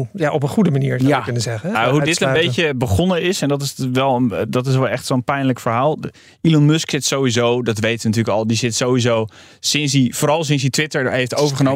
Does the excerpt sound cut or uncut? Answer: cut